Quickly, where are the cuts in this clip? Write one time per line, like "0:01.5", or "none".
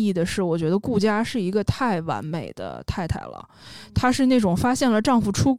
none